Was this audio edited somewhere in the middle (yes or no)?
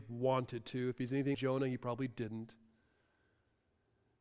yes